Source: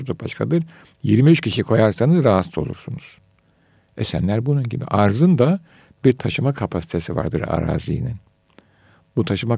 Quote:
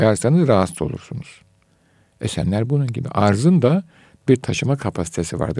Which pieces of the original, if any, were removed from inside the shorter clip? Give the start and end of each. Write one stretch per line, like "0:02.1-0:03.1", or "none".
none